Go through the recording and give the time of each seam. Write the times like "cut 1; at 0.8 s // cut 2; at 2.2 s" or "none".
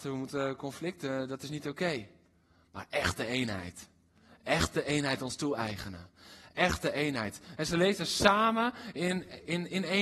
cut 1; at 7.6 s